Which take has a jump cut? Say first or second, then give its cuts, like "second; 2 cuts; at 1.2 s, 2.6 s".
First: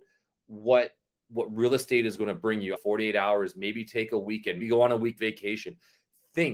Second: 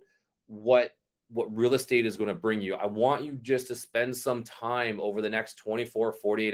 first; 2 cuts; at 2.8 s, 4.6 s